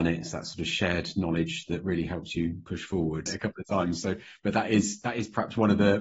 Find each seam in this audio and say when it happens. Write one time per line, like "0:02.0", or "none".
0:03.3

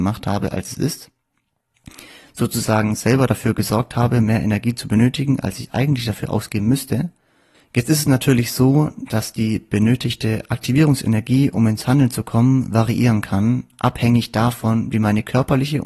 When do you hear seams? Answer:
0:07.5

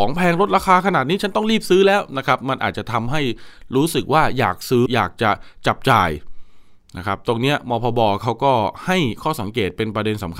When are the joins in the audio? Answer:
0:04.9

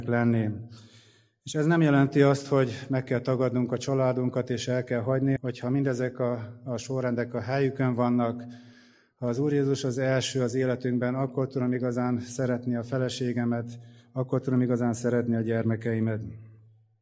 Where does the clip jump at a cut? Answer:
0:05.4

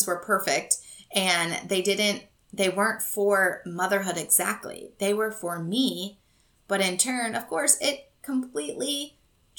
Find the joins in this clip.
none

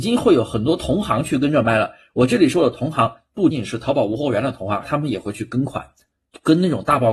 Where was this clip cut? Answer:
0:03.5
0:04.8

